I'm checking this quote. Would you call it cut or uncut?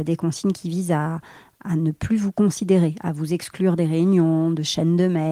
uncut